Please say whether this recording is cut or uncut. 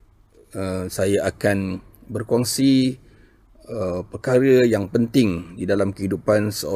uncut